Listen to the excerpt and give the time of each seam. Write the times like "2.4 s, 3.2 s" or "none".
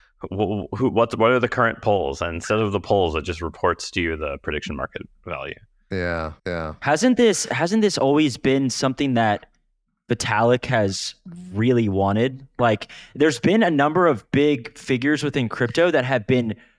6.4 s